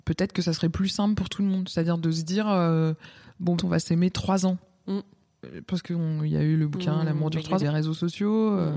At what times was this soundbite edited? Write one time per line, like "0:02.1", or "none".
0:03.6
0:07.6